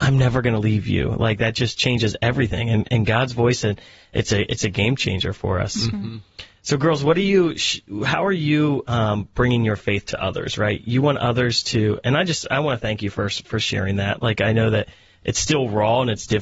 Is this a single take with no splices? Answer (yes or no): yes